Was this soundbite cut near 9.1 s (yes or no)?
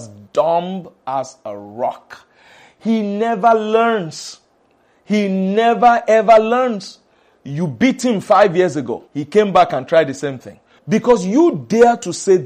yes